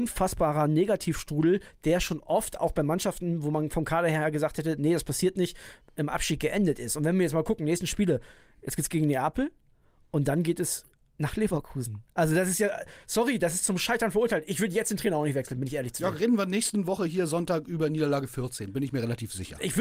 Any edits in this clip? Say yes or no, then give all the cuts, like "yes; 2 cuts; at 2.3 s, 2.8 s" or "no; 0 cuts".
no; 0 cuts